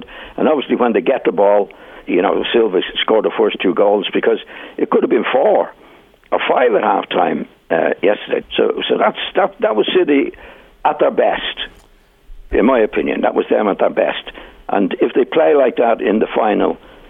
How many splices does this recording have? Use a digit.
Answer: 3